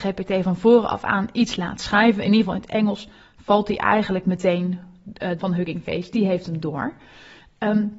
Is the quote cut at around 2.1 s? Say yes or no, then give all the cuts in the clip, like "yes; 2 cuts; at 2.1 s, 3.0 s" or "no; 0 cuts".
no; 1 cut; at 5.4 s